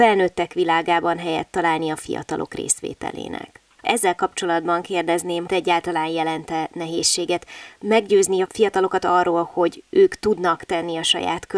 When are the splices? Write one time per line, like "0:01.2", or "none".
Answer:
0:03.8
0:05.5